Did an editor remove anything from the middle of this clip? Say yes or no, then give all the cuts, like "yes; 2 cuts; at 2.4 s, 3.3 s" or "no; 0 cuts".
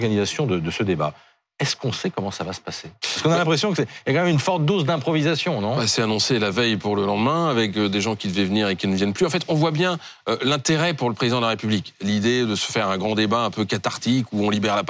no; 0 cuts